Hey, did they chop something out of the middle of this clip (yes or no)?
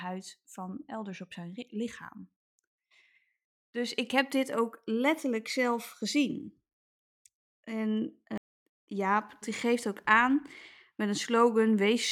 yes